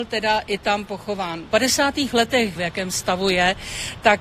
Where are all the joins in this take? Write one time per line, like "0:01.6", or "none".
0:01.5
0:02.6